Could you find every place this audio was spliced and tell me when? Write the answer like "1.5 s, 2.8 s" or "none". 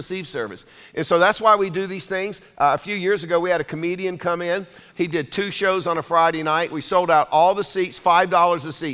4.9 s